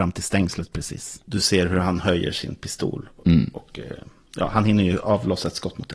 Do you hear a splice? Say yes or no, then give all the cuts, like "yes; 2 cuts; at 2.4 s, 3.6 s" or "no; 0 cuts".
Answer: yes; 1 cut; at 1.2 s